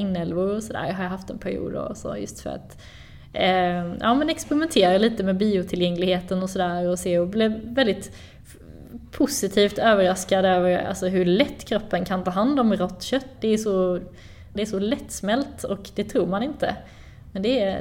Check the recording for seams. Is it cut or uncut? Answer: cut